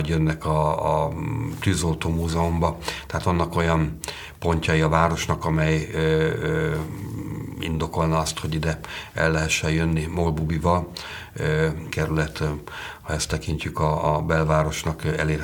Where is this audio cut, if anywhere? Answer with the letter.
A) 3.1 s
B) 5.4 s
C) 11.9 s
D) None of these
C